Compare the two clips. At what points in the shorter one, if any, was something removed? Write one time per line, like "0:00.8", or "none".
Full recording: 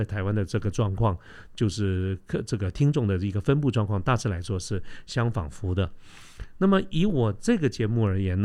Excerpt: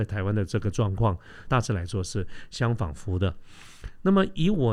0:01.5